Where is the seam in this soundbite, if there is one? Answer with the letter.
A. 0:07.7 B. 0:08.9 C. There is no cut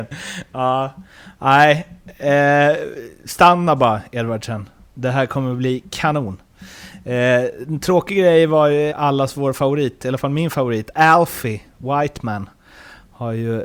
B